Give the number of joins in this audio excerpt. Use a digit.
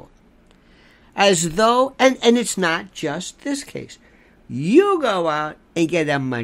1